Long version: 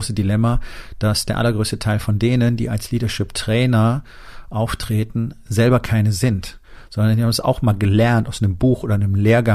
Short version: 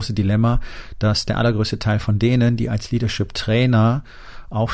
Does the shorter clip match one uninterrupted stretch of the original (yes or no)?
yes